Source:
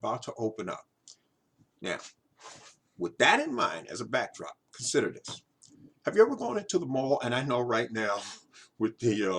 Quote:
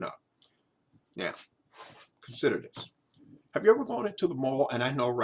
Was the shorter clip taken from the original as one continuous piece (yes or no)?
no